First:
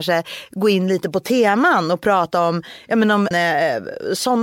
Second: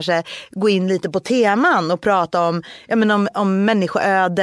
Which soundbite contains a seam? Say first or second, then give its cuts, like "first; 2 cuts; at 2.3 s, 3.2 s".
first; 1 cut; at 3.3 s